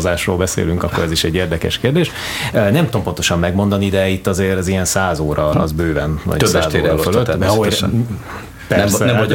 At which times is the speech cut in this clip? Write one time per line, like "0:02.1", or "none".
0:05.5

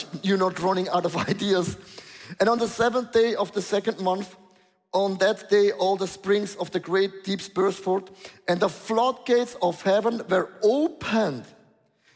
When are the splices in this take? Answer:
none

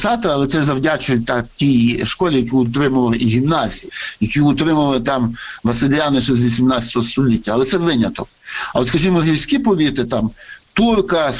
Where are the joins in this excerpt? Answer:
none

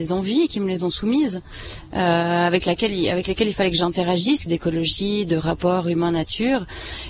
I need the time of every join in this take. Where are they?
0:04.5

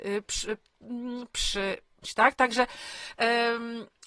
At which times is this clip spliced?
0:02.0

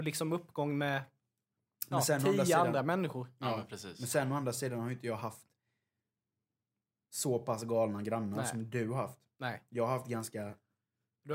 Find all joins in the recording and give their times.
none

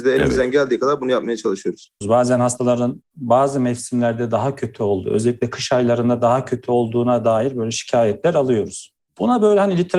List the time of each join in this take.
0:02.0

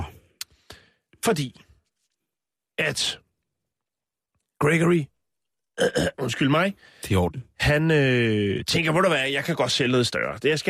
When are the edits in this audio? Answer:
none

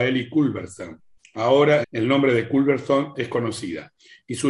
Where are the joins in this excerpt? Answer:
0:01.8

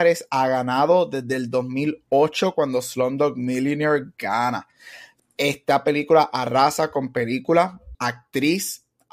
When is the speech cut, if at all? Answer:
0:05.2
0:07.9

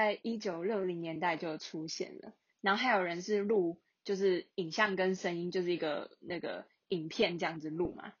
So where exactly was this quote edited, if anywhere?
0:02.5

